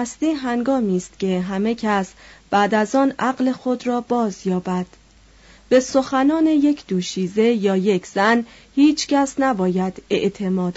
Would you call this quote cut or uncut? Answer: uncut